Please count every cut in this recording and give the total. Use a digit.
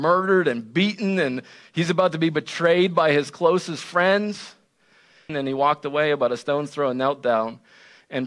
1